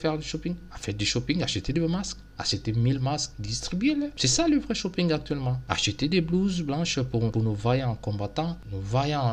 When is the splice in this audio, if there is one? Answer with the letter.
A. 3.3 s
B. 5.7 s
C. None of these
A